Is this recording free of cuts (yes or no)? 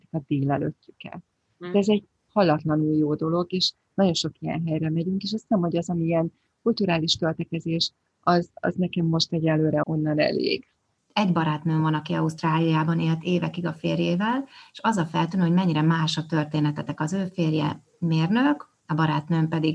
no